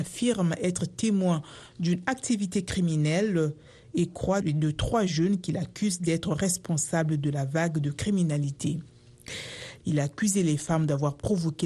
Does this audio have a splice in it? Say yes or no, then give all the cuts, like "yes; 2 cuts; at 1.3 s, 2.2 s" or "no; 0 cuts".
yes; 2 cuts; at 4.4 s, 9.8 s